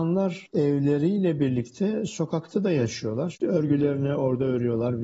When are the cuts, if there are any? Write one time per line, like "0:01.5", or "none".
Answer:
0:03.3